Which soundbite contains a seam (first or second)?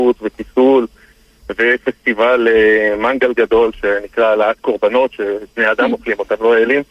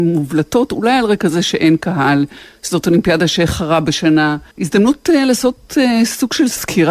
second